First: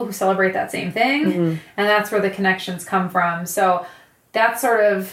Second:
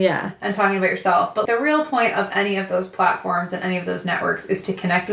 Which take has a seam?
second; 1 cut; at 1.5 s

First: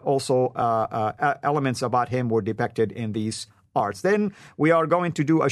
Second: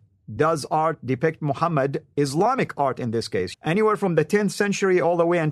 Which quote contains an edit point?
second; 1 cut; at 3.5 s

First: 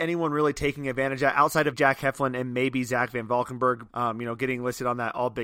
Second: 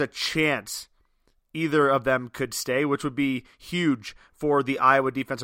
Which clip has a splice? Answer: first; 2 cuts; at 1.7 s, 3.9 s

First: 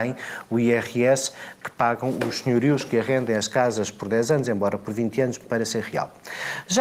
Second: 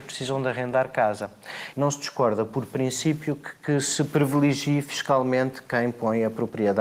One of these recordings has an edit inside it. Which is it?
second; 1 cut; at 1.7 s

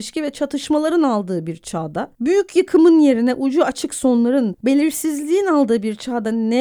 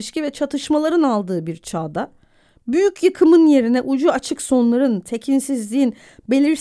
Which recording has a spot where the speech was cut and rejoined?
first; 2 cuts; at 2.1 s, 4.5 s

